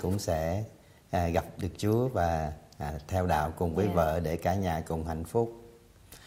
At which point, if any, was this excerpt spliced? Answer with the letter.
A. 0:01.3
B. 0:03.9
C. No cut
C